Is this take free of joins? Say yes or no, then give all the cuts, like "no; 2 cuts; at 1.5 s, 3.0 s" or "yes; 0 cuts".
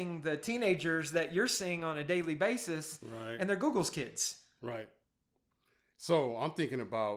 yes; 0 cuts